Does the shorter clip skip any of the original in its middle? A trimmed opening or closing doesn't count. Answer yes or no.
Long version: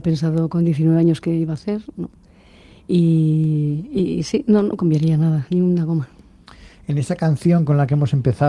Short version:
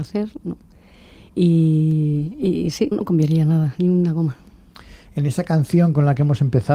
yes